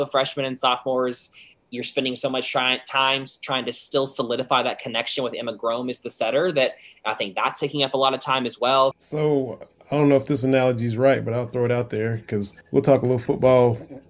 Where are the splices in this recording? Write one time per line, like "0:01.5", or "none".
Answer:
0:08.9
0:12.6